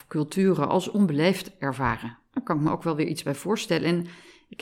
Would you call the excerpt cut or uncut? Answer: uncut